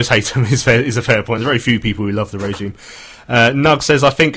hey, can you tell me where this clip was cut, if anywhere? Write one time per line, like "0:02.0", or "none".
none